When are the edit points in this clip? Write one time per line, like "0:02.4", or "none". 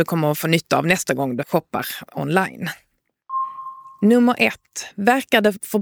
none